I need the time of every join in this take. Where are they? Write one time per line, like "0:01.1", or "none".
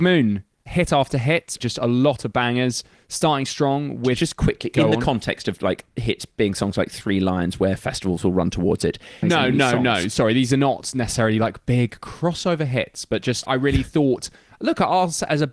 0:09.2